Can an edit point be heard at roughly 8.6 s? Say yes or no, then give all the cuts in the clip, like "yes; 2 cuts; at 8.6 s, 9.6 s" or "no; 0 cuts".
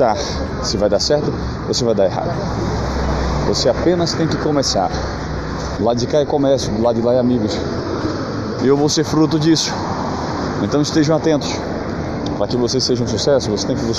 yes; 2 cuts; at 5.8 s, 8.6 s